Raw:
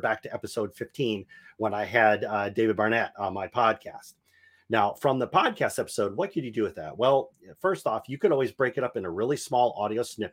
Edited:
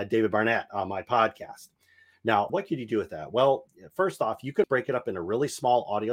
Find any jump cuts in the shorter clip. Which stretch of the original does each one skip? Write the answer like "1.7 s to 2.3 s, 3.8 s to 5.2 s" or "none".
4.9 s to 6.1 s, 8.3 s to 8.5 s